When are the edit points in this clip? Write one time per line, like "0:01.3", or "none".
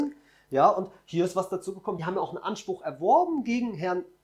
none